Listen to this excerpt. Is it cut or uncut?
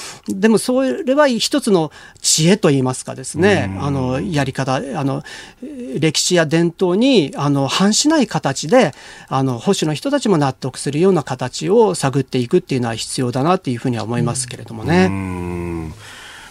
uncut